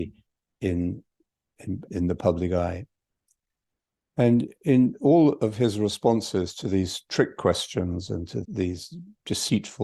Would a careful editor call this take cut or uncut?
cut